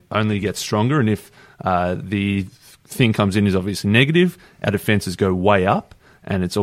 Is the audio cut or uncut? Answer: uncut